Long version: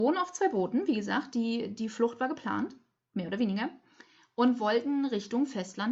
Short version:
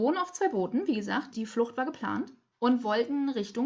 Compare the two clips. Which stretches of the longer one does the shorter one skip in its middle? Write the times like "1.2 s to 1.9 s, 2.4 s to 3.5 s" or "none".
1.3 s to 1.7 s, 2.9 s to 4.3 s